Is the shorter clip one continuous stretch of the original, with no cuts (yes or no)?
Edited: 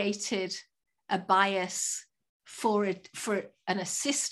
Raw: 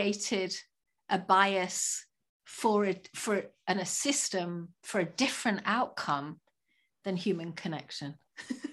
yes